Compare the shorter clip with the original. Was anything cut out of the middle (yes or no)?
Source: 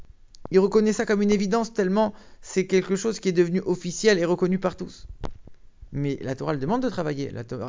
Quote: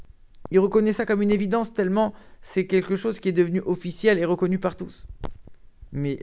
no